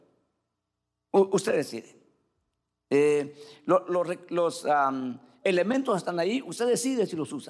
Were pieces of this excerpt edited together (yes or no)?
yes